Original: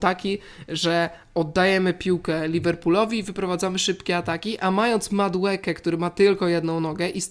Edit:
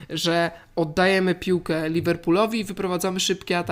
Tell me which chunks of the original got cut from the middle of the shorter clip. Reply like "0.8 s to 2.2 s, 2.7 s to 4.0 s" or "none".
none